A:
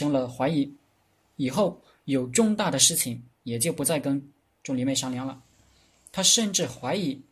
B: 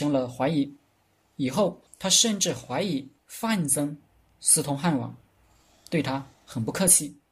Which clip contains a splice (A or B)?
B